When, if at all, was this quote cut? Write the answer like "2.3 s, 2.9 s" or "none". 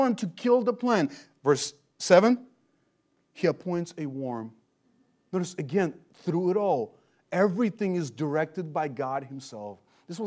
1.4 s, 5.2 s